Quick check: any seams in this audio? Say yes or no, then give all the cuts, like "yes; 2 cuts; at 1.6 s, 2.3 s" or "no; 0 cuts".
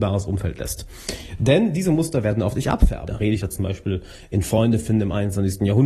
yes; 1 cut; at 3.1 s